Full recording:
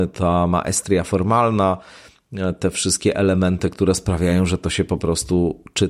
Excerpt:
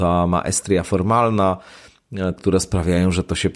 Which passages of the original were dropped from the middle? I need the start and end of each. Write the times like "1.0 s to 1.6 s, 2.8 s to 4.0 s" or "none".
2.6 s to 3.7 s